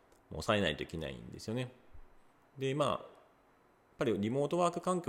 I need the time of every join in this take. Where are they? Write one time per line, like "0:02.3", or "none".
0:02.4